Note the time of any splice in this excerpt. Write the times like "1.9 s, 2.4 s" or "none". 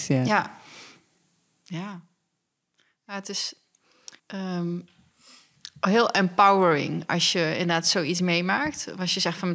4.2 s